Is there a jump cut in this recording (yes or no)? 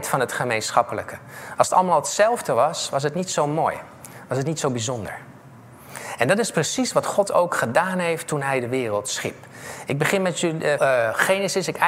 yes